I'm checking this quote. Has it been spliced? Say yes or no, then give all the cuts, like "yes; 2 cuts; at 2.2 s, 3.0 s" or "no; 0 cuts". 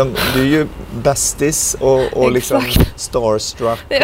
no; 0 cuts